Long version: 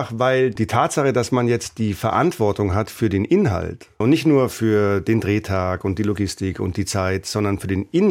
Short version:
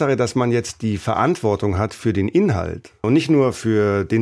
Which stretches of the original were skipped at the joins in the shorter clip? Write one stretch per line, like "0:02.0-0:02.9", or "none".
none